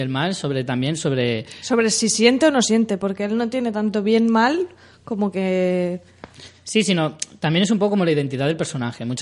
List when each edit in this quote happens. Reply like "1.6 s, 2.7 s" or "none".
none